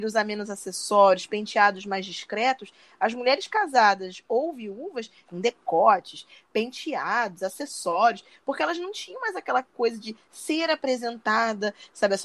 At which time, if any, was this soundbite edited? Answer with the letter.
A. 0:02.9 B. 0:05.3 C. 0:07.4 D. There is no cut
B